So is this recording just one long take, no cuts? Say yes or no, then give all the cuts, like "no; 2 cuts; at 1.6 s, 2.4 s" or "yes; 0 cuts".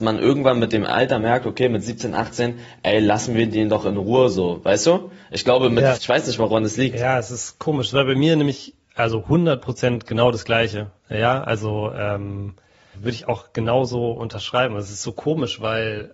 no; 2 cuts; at 6.0 s, 12.9 s